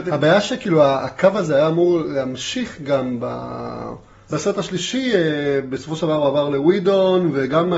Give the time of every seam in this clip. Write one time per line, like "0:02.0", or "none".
0:04.3